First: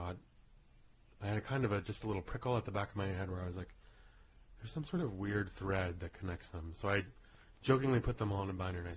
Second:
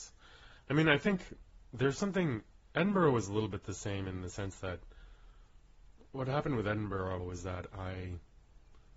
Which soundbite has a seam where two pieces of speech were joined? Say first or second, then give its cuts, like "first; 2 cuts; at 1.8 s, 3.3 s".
second; 1 cut; at 7.2 s